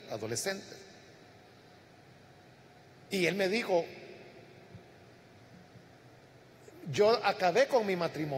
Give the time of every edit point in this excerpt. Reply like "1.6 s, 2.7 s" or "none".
none